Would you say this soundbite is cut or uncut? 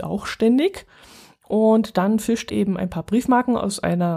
cut